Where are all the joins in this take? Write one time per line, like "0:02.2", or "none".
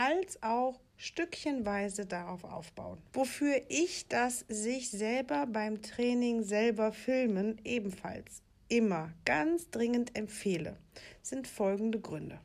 0:03.1